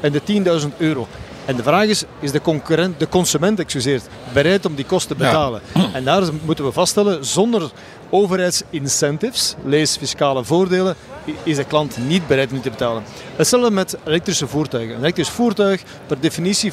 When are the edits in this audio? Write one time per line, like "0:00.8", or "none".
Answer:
none